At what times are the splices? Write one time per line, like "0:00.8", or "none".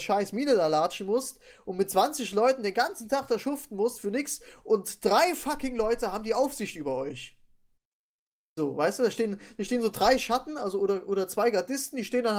none